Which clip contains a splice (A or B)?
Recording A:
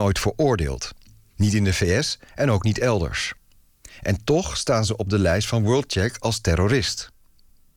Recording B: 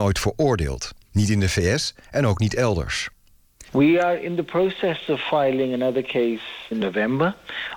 B